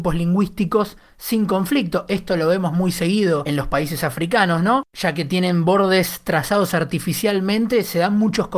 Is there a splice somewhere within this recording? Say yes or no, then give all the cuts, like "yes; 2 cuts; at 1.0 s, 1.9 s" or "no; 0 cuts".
no; 0 cuts